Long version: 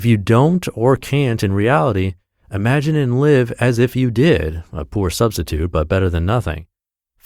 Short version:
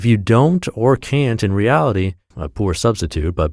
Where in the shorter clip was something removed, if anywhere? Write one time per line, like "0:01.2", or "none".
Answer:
0:02.3